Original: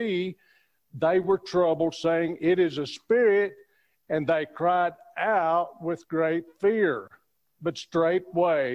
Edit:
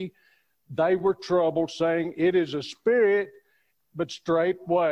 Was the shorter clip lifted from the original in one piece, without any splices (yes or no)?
no